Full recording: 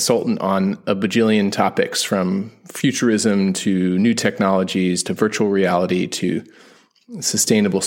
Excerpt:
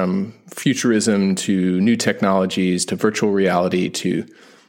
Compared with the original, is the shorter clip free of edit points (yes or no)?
yes